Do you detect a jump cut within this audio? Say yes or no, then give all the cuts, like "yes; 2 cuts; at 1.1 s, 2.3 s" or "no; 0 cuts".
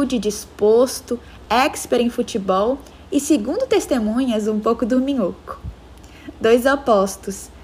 no; 0 cuts